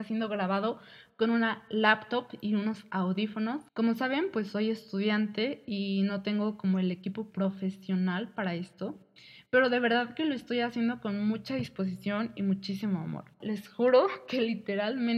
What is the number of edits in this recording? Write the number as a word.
two